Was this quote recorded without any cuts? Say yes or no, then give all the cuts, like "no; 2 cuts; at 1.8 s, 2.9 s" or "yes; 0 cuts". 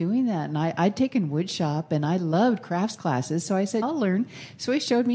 no; 1 cut; at 3.8 s